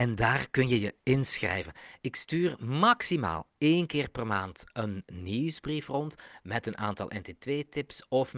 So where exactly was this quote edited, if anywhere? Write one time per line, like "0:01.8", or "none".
none